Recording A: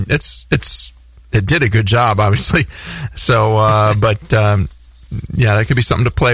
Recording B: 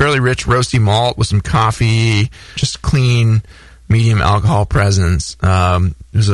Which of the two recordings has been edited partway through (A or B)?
B